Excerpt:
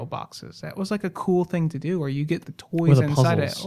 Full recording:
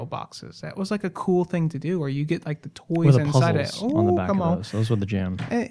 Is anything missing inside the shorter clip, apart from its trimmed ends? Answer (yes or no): yes